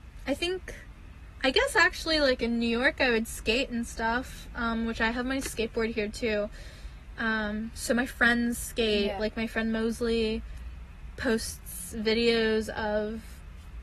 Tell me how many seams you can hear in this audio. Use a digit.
1